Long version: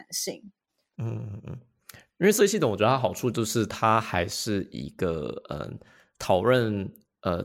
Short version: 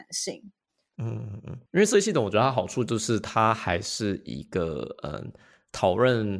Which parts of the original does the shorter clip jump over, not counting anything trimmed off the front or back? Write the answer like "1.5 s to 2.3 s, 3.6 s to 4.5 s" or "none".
1.7 s to 2.1 s